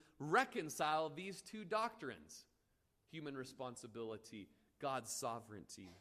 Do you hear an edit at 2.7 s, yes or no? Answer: no